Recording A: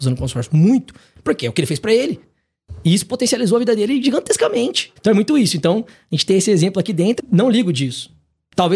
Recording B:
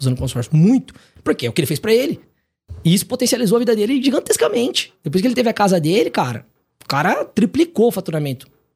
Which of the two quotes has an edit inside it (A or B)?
A